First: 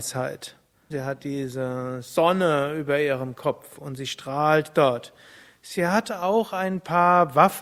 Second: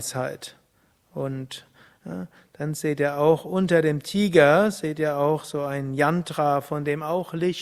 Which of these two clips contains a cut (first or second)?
first